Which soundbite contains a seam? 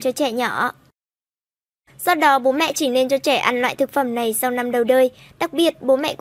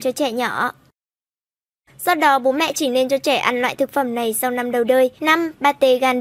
second; 1 cut; at 5.2 s

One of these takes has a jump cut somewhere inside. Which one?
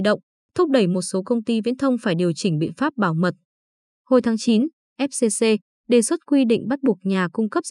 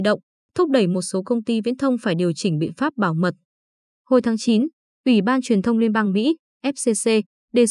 first; 1 cut; at 4.8 s

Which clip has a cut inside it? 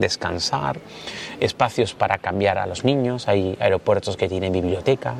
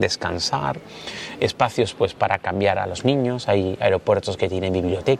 first; 1 cut; at 1.9 s

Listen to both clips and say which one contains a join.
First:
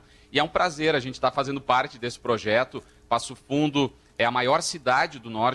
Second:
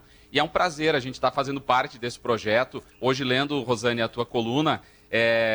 second; 1 cut; at 2.9 s

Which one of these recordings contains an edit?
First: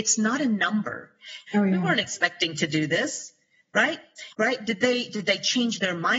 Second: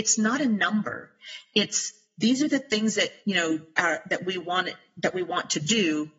first; 2 cuts; at 1.5 s, 4.3 s

